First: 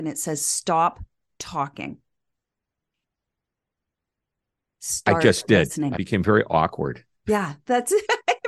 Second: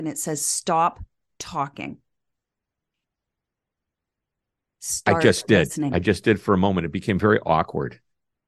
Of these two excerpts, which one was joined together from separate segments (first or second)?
first